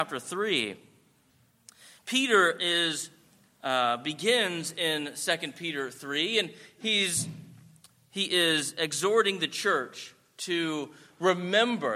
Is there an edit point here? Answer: no; 0 cuts

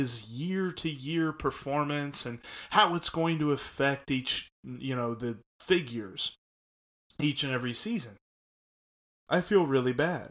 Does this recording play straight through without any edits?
no; 1 cut; at 9.3 s

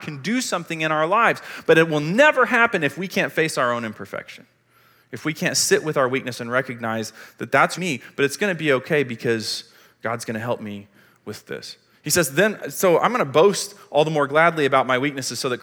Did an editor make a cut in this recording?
yes; 1 cut; at 7.8 s

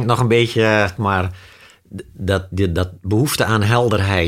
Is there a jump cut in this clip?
yes; 1 cut; at 1.0 s

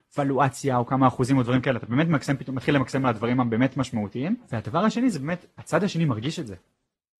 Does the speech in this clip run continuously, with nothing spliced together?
yes; 0 cuts

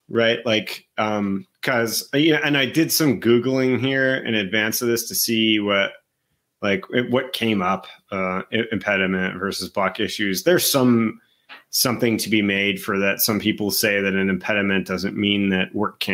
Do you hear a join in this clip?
no; 0 cuts

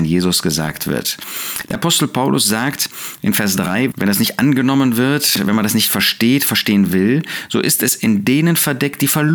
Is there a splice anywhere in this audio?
yes; 2 cuts; at 1.7 s, 3.9 s

